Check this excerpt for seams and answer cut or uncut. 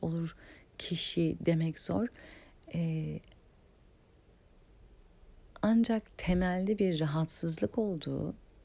uncut